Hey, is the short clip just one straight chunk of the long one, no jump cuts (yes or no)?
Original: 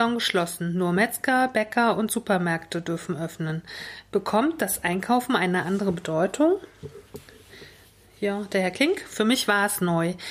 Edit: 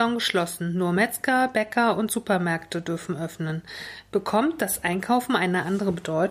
yes